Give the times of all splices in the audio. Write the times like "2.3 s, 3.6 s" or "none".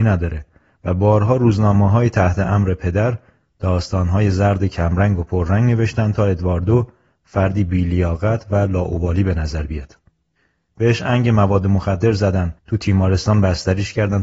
10.7 s, 12.6 s

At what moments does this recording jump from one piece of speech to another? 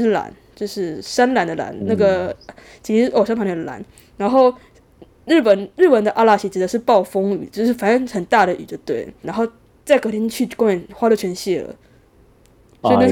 9.2 s

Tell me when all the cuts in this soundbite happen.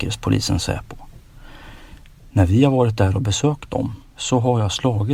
4.1 s

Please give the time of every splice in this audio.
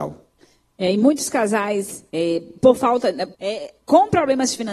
2.1 s, 3.3 s

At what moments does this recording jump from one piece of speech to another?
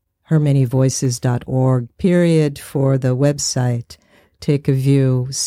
none

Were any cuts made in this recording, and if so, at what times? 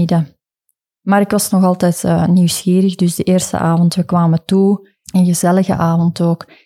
5.0 s

